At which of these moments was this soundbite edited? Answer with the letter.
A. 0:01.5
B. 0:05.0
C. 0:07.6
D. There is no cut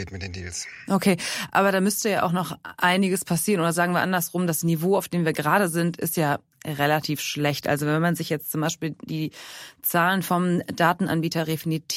D